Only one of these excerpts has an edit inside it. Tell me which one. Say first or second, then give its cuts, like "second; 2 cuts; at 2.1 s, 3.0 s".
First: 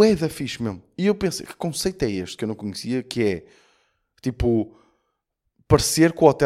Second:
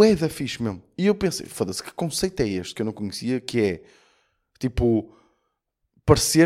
first; 1 cut; at 1.5 s